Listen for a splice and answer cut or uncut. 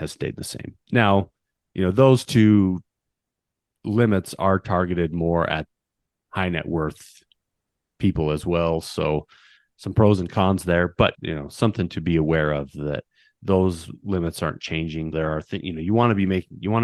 cut